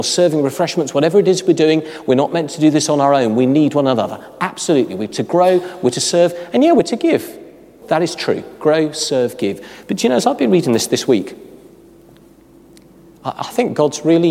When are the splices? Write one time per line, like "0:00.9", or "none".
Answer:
0:07.8